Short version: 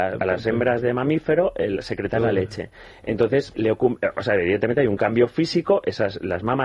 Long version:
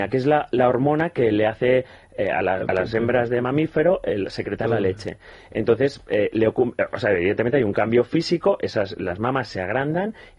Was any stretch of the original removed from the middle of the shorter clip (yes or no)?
yes